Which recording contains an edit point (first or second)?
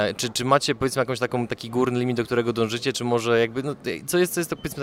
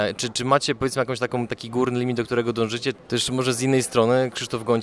second